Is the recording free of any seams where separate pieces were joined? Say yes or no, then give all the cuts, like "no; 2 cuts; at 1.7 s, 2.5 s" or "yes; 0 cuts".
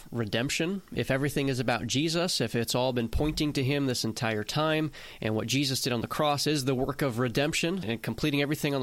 no; 1 cut; at 7.8 s